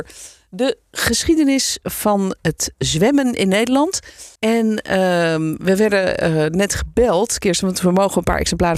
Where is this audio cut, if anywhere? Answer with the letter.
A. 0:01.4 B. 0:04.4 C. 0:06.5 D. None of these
B